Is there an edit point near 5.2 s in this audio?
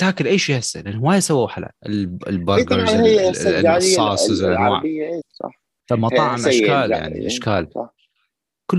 yes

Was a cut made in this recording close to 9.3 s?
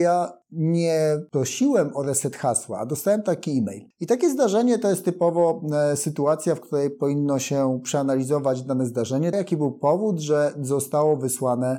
yes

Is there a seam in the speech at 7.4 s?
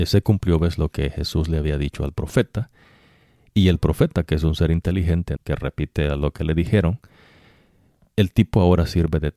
no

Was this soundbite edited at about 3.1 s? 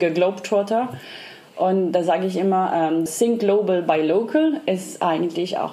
yes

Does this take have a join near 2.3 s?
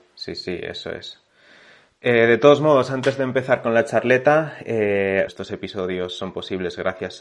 no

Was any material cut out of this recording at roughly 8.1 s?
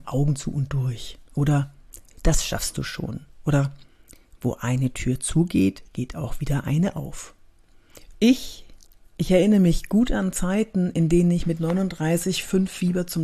yes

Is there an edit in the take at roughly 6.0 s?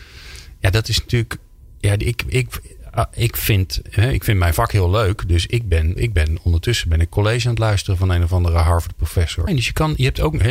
yes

